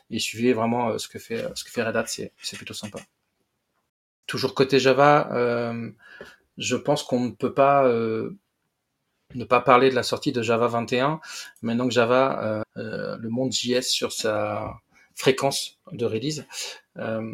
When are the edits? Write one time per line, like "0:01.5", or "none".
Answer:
0:12.6